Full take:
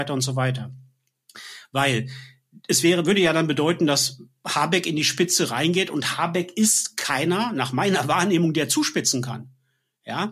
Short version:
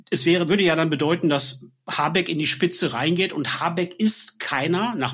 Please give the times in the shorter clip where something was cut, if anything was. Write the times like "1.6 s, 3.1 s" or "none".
none